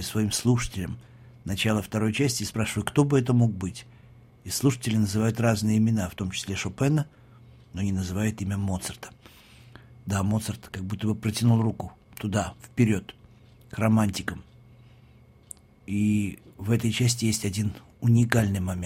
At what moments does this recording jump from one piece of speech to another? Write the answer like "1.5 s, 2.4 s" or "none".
none